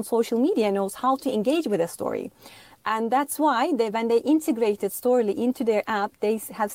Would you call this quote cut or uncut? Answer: uncut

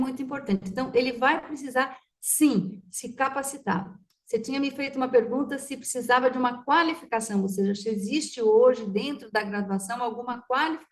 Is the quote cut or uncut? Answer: uncut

